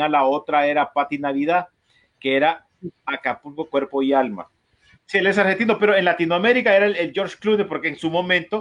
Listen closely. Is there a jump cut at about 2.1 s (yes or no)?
no